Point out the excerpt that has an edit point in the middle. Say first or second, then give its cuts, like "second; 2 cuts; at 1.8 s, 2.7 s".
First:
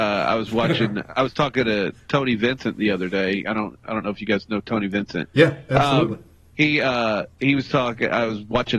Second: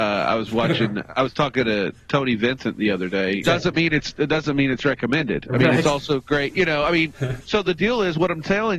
second; 2 cuts; at 3.4 s, 7.4 s